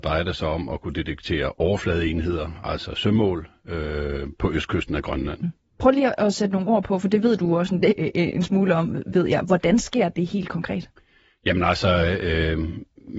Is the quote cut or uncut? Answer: cut